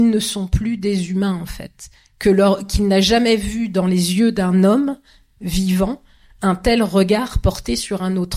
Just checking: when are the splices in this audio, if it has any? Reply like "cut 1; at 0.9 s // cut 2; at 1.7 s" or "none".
none